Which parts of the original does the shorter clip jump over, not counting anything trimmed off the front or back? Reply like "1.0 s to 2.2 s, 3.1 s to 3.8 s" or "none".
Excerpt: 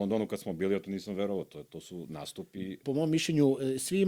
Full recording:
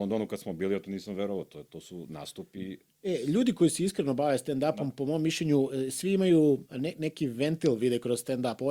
2.8 s to 4.9 s